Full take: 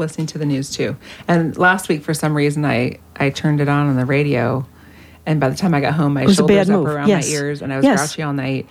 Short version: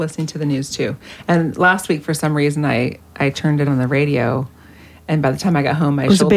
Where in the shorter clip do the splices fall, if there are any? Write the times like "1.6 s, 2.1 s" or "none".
3.7 s